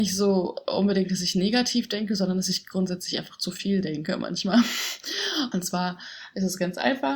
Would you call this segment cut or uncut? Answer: cut